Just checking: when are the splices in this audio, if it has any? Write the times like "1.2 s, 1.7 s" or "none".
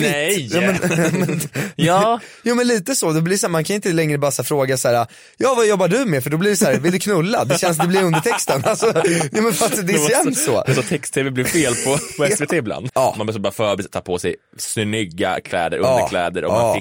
12.9 s